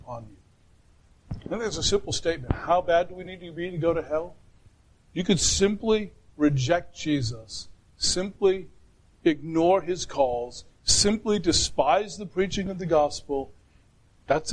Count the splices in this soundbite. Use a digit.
0